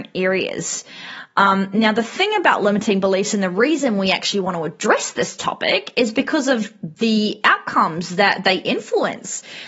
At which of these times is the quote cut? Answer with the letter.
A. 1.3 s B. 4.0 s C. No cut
C